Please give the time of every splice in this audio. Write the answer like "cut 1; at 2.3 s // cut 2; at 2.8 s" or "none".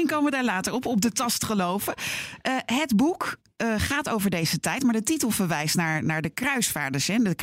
none